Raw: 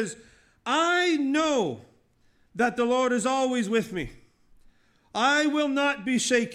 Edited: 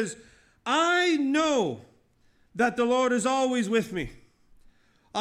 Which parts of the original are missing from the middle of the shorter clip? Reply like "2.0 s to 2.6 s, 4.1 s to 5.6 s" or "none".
none